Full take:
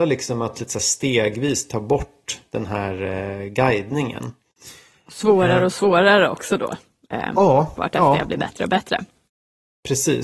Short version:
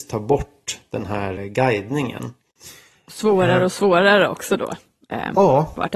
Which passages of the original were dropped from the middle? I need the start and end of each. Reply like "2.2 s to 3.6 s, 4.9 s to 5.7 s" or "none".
3.0 s to 3.4 s

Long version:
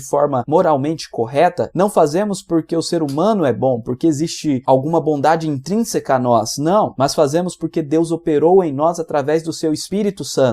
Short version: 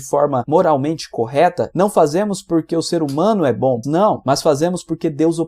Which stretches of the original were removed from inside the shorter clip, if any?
3.8 s to 6.6 s

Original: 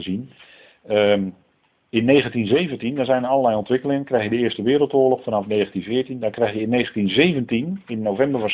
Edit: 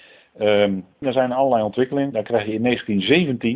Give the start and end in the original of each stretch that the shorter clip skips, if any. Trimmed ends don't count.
1.5 s to 2.9 s, 4.0 s to 6.2 s

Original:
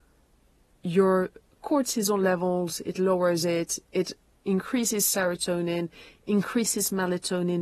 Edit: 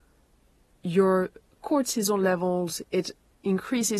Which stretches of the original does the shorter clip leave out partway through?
2.8 s to 3.8 s

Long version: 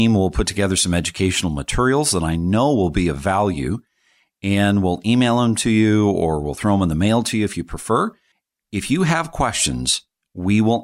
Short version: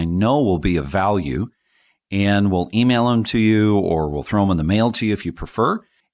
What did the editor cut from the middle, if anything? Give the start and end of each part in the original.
none

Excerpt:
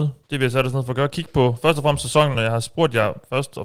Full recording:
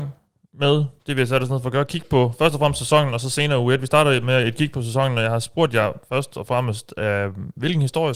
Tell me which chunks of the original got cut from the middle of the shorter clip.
3.1 s to 5.1 s

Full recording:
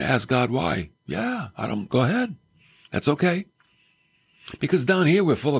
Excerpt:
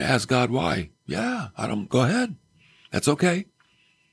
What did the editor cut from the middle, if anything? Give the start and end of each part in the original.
none

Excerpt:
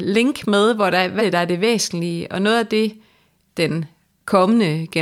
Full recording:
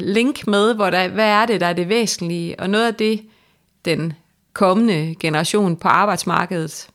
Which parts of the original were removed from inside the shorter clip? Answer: 1.2 s to 1.5 s

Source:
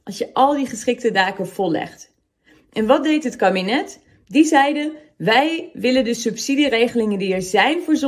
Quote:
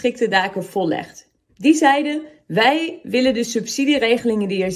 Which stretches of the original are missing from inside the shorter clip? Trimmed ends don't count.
2.3 s to 4.2 s

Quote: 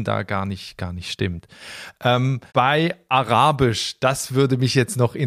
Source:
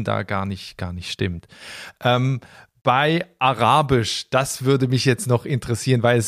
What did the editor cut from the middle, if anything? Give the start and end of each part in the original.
2.5 s to 2.8 s

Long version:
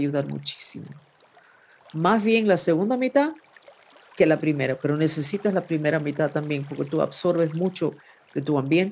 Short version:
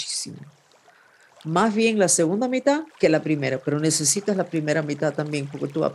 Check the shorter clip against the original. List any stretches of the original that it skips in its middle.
3.4 s to 4.1 s

